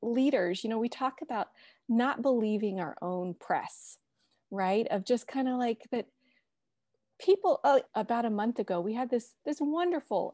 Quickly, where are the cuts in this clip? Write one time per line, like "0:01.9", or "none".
0:07.9